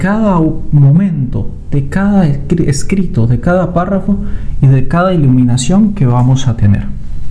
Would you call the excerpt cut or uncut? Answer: uncut